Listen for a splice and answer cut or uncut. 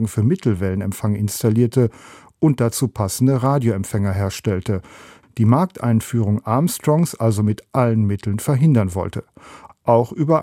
uncut